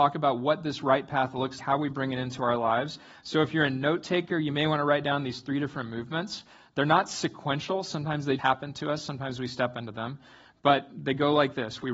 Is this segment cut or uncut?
cut